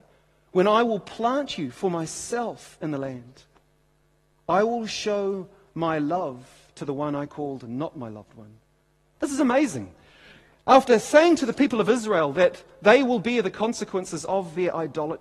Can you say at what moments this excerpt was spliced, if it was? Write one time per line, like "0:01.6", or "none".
0:09.2